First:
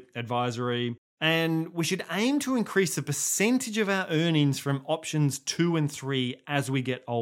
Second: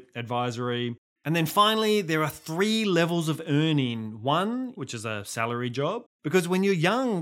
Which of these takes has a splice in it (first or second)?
second